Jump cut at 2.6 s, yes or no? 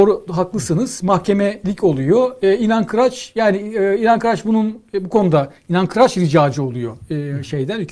no